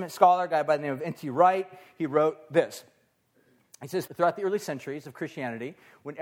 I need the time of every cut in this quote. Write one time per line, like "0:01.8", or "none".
0:04.1